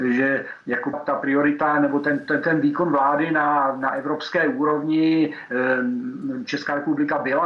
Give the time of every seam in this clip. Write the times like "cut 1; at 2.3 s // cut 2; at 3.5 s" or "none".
cut 1; at 0.9 s

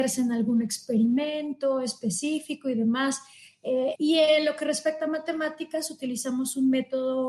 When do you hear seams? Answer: cut 1; at 4.0 s

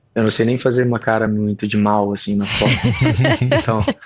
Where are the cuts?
none

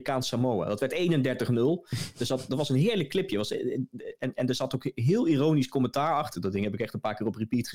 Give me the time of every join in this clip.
cut 1; at 6.3 s

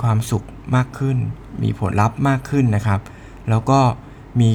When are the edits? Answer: cut 1; at 1.9 s

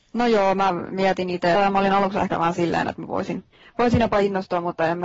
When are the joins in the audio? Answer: cut 1; at 1.5 s

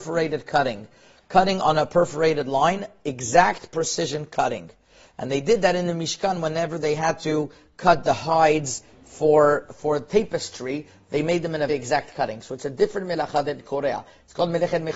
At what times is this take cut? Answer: cut 1; at 11.7 s

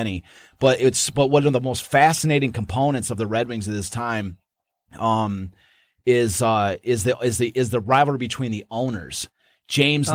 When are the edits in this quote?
none

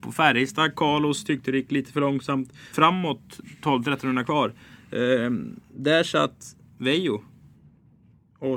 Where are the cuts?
cut 1; at 2.7 s

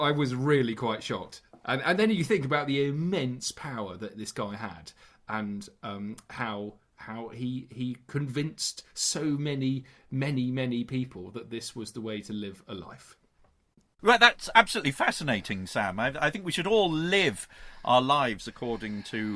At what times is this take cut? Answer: none

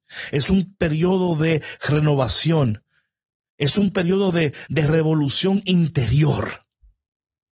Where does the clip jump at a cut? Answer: cut 1; at 4.7 s

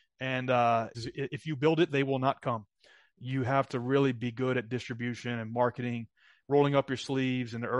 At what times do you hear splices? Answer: cut 1; at 0.9 s

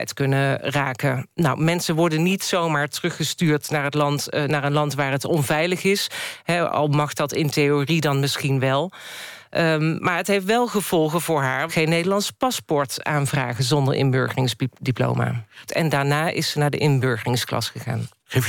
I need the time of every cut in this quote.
cut 1; at 11.7 s // cut 2; at 15.7 s

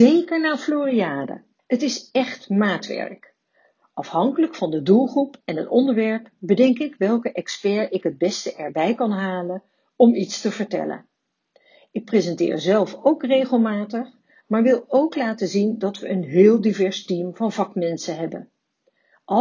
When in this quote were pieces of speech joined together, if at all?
cut 1; at 1.6 s

